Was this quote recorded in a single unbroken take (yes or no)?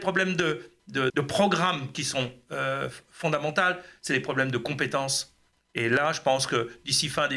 no